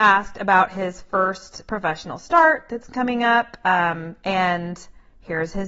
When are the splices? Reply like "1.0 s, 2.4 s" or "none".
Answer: 4.2 s